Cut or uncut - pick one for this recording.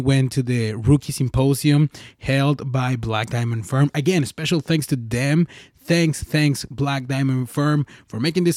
uncut